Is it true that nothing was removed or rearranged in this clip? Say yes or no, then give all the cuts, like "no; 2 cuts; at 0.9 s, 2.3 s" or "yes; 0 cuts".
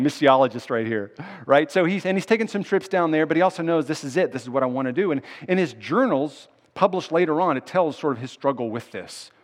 yes; 0 cuts